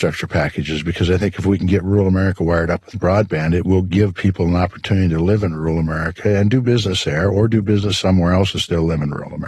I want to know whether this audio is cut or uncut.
uncut